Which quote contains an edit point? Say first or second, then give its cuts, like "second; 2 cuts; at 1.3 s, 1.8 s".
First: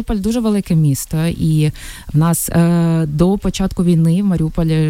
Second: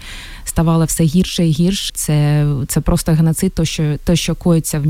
second; 1 cut; at 1.9 s